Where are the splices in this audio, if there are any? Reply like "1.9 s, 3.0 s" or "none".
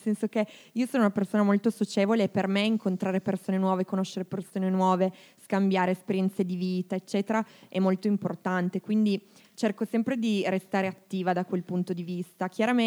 none